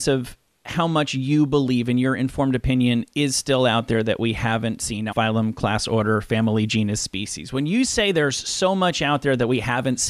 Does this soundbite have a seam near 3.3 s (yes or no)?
no